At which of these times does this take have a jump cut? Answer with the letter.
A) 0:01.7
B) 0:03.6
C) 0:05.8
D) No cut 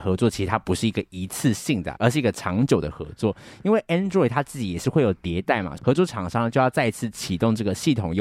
C